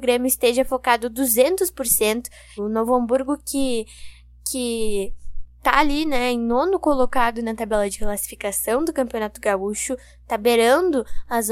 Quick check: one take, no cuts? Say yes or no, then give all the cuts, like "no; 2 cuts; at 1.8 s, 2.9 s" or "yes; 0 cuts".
no; 1 cut; at 2.6 s